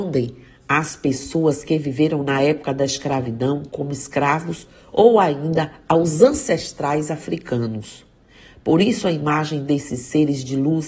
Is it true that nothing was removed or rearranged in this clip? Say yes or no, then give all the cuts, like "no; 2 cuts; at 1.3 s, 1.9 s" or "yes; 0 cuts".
yes; 0 cuts